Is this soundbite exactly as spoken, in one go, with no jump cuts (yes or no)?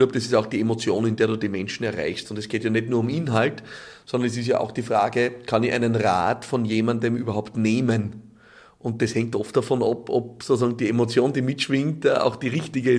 yes